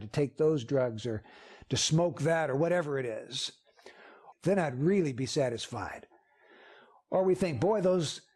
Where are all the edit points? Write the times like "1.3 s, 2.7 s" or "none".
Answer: 4.3 s